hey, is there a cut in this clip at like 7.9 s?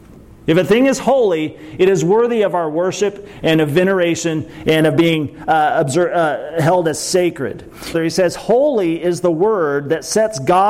yes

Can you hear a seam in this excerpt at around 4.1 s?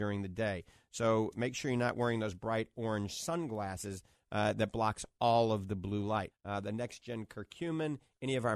no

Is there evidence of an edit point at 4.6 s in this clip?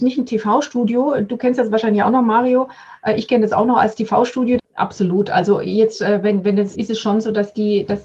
yes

